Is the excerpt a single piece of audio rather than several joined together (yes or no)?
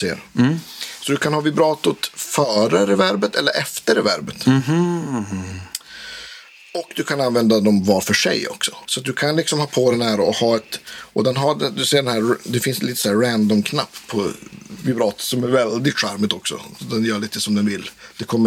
no